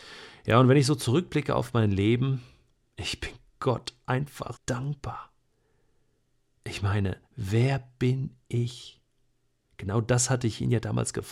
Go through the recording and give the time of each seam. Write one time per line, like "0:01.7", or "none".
0:02.9
0:04.5
0:07.3